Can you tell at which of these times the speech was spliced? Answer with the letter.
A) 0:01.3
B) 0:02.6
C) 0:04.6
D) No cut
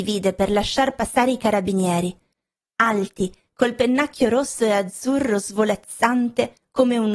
D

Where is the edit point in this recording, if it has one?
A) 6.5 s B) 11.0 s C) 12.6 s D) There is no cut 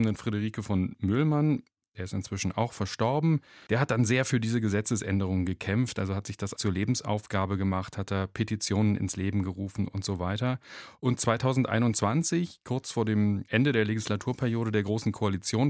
A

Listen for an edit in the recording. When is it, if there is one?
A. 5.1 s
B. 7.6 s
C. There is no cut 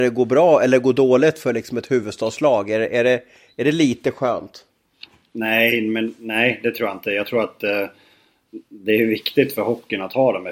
C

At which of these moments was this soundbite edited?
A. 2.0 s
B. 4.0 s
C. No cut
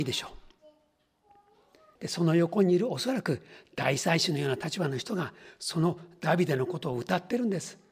A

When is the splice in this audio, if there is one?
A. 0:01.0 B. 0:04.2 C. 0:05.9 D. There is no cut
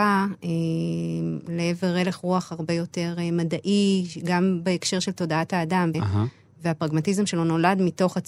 C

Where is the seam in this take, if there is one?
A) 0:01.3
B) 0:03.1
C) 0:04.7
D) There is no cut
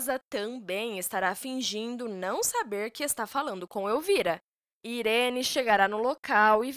C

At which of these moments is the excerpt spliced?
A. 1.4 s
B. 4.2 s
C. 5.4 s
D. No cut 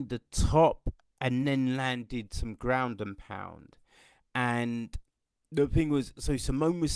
D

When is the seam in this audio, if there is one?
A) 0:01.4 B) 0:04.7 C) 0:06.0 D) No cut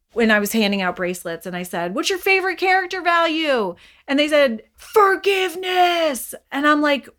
B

